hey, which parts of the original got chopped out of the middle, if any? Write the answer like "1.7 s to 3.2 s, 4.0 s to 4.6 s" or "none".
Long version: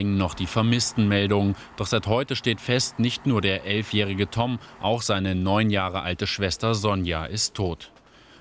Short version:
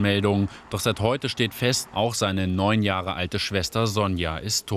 2.9 s to 4.7 s